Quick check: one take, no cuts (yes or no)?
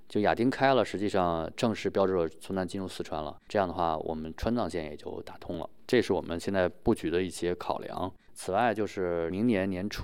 no